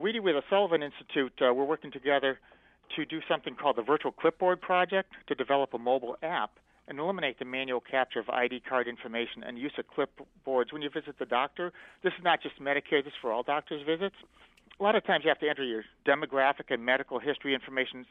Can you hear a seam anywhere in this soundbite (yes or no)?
no